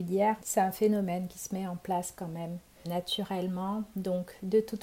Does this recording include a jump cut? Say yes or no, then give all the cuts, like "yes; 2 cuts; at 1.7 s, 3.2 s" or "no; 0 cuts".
yes; 1 cut; at 2.8 s